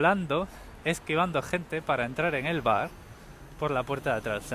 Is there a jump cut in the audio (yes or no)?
no